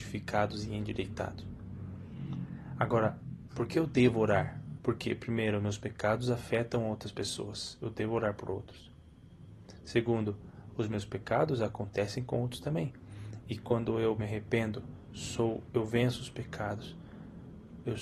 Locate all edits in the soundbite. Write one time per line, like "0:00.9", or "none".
0:04.8
0:10.7